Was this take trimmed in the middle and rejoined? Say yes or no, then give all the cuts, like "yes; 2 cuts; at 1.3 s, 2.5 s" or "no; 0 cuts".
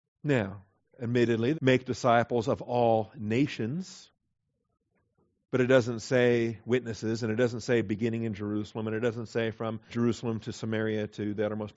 yes; 2 cuts; at 1.5 s, 9.9 s